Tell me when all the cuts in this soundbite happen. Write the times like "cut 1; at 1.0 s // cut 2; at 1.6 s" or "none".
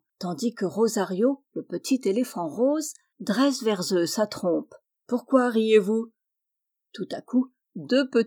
none